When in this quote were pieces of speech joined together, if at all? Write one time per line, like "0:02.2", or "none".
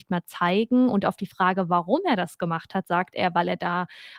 none

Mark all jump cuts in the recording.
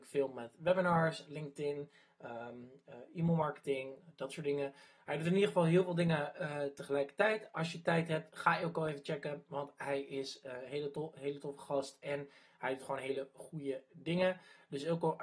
none

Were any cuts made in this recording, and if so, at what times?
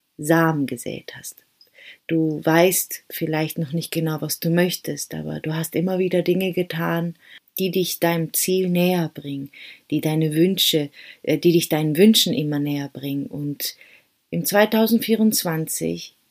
0:02.0

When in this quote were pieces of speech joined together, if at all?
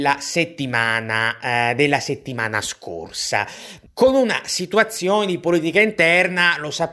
0:03.8

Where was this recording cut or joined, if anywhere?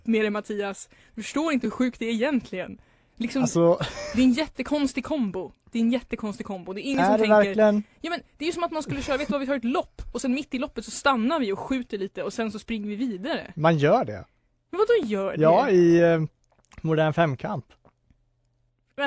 none

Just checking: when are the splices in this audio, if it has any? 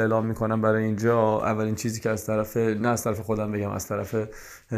none

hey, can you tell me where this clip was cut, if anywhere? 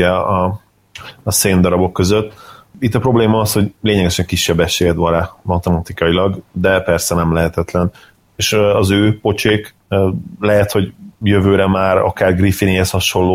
0:08.2
0:11.1

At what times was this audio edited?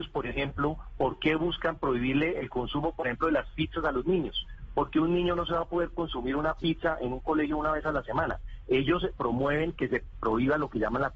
none

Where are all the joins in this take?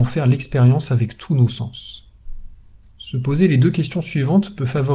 none

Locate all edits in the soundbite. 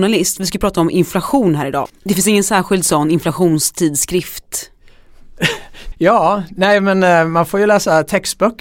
0:01.9
0:05.9

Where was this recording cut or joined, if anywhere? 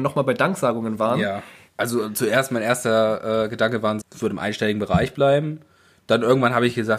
0:01.7
0:04.0

